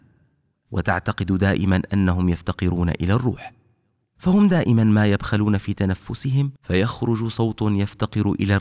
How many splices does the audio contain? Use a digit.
1